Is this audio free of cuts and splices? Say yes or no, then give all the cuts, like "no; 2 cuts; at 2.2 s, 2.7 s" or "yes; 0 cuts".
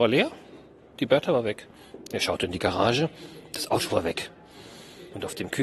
no; 1 cut; at 2.1 s